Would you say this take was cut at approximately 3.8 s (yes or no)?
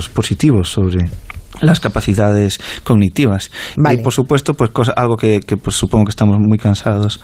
yes